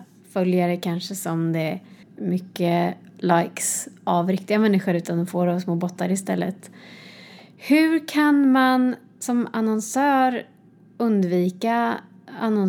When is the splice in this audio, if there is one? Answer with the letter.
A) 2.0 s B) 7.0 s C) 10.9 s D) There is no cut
A